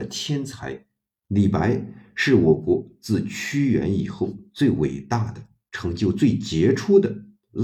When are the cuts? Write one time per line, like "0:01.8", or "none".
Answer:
0:01.1